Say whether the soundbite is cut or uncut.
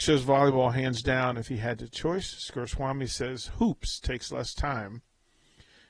uncut